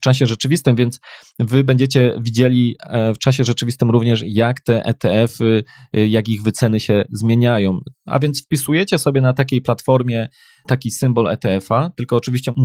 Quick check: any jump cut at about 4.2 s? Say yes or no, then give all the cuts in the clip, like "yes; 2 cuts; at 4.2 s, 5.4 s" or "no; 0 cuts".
no; 1 cut; at 7.9 s